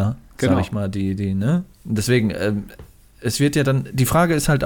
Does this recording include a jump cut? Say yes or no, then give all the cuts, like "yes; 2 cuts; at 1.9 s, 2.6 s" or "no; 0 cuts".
yes; 1 cut; at 1.7 s